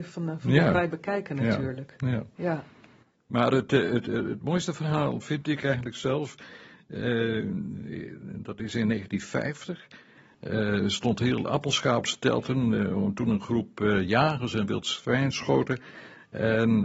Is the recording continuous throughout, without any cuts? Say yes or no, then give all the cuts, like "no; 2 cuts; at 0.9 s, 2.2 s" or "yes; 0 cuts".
yes; 0 cuts